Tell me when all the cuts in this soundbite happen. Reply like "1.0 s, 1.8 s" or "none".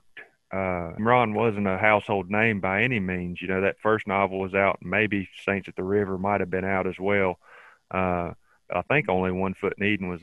1.0 s